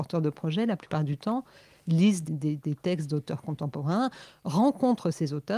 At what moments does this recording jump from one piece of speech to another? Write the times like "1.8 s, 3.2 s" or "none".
2.3 s